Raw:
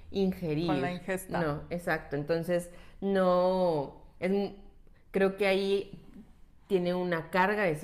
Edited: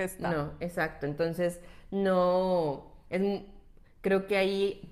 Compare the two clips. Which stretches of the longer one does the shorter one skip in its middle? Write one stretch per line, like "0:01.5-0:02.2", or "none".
none